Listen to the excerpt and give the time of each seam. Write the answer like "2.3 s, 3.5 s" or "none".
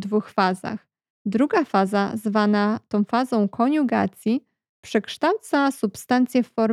1.1 s